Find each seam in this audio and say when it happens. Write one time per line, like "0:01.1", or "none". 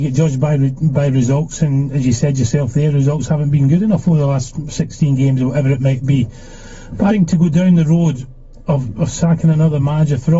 0:07.1